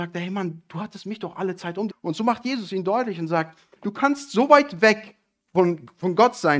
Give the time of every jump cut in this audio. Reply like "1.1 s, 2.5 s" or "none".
1.9 s, 3.8 s